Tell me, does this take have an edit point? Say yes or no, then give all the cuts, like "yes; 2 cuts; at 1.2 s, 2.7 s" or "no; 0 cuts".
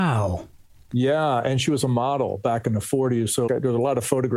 yes; 1 cut; at 3.5 s